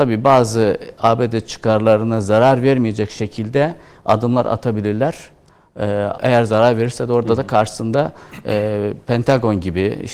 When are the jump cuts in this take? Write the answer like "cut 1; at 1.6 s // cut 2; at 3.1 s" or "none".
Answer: cut 1; at 6.2 s